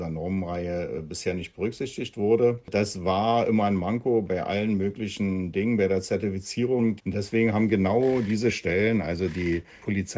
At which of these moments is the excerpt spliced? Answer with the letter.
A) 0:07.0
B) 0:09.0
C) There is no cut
A